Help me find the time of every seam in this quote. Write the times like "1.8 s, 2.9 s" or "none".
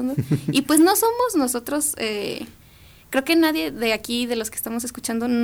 none

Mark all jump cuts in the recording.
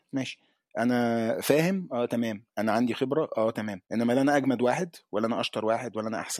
3.8 s

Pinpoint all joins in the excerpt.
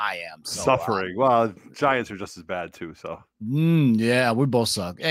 3.3 s

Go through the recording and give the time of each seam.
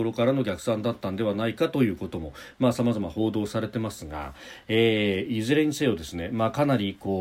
none

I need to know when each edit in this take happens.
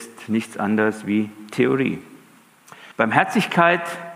2.9 s

